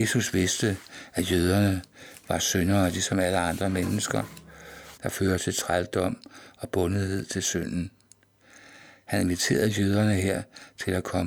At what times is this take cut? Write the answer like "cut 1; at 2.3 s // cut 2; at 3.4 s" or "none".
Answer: cut 1; at 5.0 s